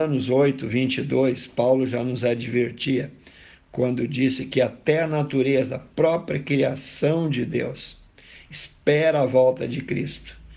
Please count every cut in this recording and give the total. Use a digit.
0